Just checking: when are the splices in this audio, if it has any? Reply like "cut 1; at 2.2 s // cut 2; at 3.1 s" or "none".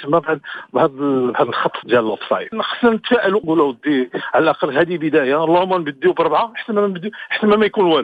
cut 1; at 1.8 s